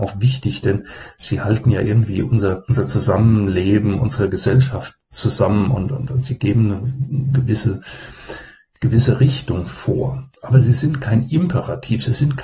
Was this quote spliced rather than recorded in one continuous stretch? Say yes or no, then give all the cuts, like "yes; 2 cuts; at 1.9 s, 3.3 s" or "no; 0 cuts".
yes; 1 cut; at 5.9 s